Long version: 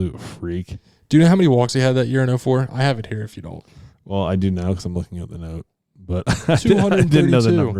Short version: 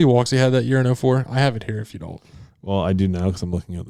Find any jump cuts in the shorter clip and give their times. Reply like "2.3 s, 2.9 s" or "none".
none